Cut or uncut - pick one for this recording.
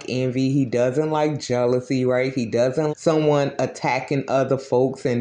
cut